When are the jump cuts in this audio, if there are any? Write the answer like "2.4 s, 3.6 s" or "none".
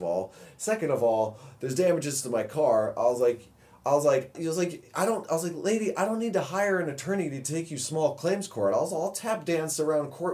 4.3 s